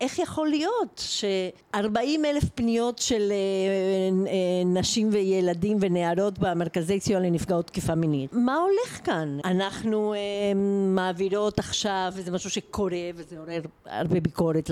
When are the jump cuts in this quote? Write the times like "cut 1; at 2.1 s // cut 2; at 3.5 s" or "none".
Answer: cut 1; at 1.6 s // cut 2; at 9.4 s